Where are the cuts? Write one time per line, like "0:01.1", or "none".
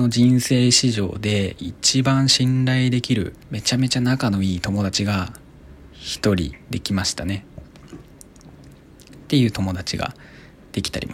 0:03.4
0:07.6